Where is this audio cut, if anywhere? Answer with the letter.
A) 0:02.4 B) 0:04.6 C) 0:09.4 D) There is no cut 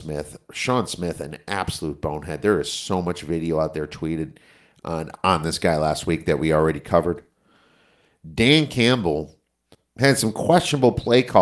D